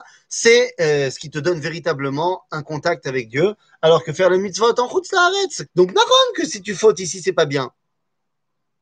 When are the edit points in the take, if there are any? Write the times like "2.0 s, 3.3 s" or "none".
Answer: 5.7 s